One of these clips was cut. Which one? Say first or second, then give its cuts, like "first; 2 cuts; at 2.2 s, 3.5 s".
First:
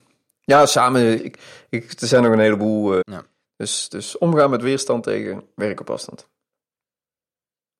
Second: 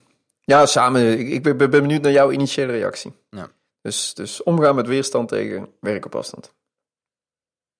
first; 2 cuts; at 1.2 s, 3.0 s